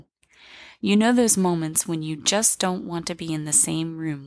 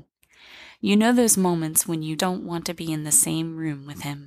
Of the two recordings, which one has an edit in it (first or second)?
second